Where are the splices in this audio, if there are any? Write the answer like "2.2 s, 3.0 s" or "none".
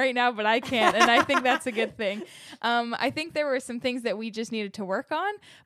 none